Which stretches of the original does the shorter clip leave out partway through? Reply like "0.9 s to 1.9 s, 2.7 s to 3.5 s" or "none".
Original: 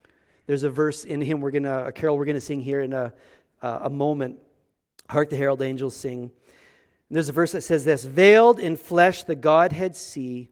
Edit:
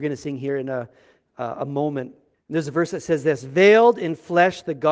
4.6 s to 6.9 s

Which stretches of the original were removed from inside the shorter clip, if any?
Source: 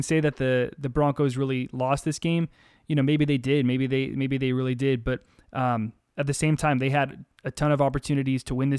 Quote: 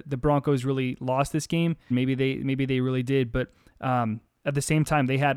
2.6 s to 3.6 s

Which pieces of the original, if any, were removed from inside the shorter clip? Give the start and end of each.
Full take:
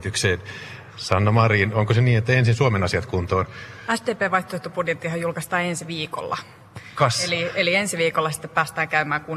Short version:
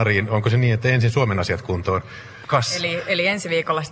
3.9 s to 6.9 s

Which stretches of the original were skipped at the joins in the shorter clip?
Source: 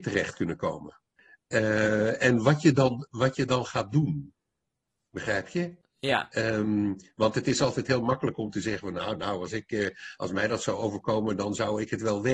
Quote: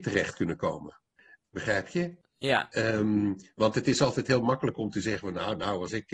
1.4 s to 5.0 s

